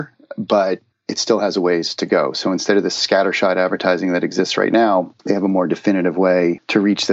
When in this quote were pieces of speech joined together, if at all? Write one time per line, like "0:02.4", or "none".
none